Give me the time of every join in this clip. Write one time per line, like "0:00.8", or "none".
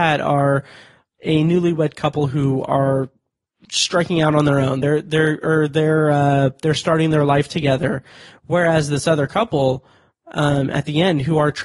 none